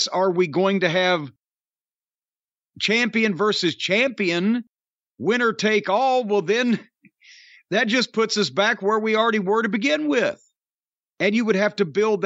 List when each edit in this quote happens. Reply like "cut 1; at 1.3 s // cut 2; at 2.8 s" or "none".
none